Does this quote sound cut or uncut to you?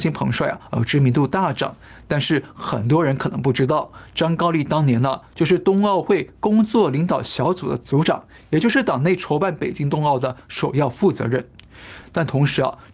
cut